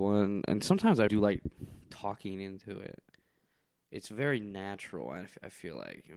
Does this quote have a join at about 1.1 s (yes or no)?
yes